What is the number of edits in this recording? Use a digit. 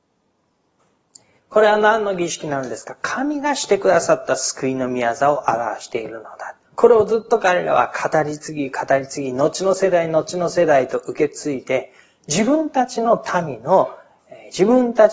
2